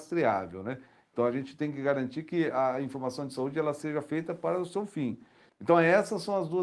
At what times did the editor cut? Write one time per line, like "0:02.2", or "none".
0:05.5